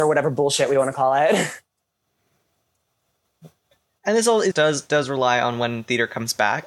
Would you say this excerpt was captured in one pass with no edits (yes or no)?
no